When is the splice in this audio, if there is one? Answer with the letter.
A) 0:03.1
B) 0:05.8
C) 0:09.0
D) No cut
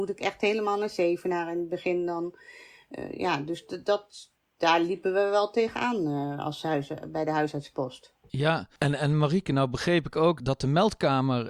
D